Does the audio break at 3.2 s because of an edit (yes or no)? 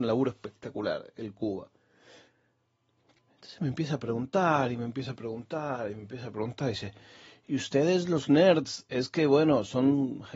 yes